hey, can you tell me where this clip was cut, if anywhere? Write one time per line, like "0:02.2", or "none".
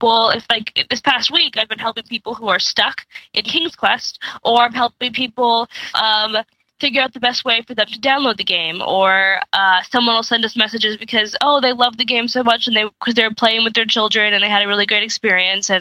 0:05.9

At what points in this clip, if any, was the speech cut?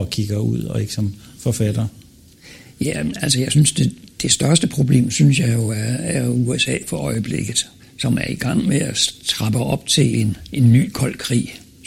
none

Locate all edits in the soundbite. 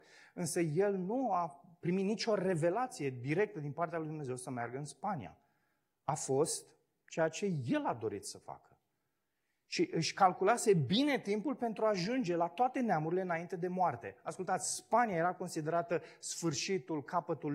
none

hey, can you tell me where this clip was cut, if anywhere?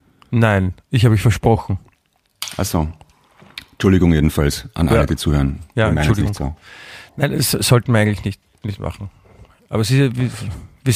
none

